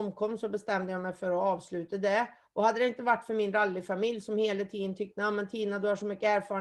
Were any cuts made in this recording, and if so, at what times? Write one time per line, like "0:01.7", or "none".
none

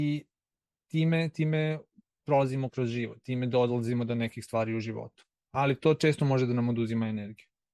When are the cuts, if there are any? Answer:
0:02.7

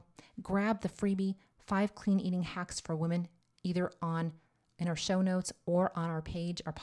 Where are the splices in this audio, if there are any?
none

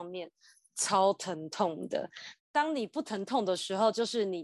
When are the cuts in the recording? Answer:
0:02.4

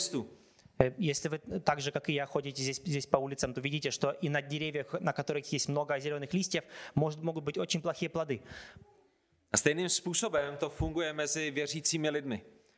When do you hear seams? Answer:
none

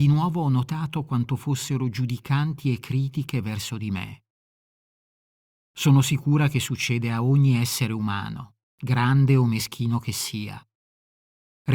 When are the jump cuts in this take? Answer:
0:05.6

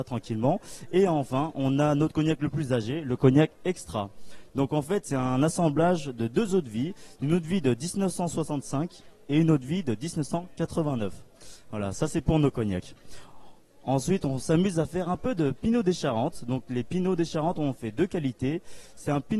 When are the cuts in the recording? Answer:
0:04.5

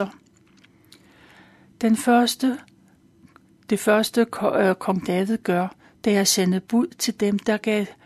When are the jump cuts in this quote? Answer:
none

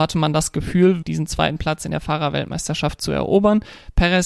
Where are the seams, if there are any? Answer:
0:01.0

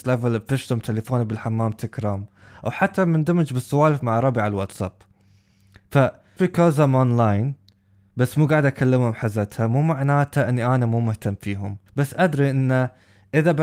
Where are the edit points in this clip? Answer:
0:06.4
0:11.9

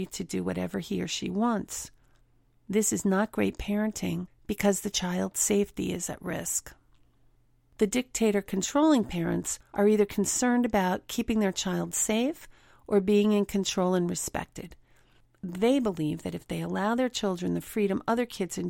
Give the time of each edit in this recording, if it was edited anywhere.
none

